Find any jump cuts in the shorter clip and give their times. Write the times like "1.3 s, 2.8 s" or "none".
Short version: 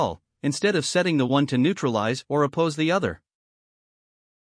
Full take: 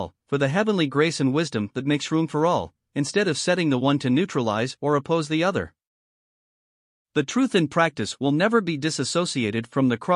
none